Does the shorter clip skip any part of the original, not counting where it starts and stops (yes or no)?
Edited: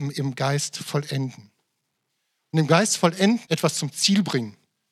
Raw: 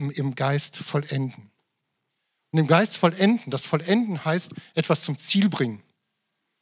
yes